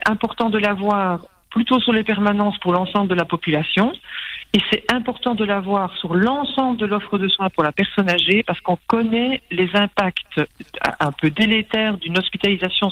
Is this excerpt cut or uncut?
uncut